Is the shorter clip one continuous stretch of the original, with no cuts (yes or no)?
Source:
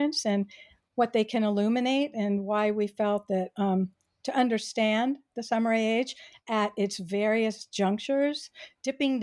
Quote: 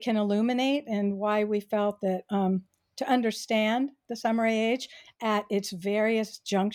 yes